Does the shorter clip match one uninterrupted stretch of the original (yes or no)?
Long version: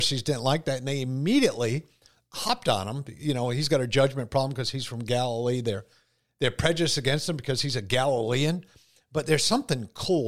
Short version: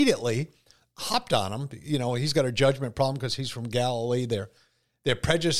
yes